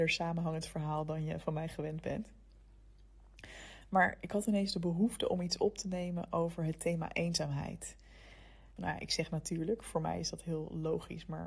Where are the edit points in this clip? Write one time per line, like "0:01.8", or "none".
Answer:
0:08.8